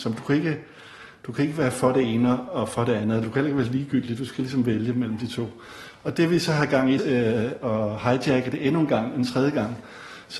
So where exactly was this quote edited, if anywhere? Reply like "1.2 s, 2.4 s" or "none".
7.0 s